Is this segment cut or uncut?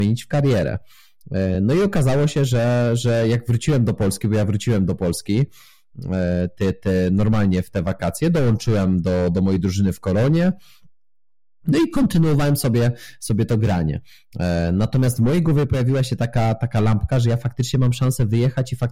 uncut